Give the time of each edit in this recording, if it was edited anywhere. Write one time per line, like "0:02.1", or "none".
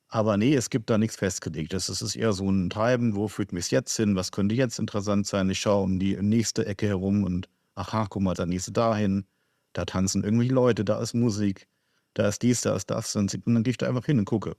0:08.3